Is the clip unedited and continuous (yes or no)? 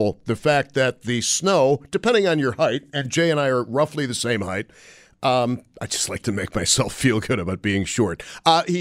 yes